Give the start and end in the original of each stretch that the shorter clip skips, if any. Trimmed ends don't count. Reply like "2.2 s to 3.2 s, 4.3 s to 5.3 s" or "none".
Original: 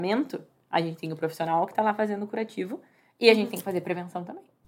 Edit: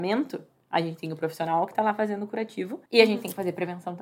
2.9 s to 3.1 s